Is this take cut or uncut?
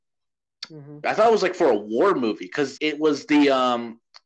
cut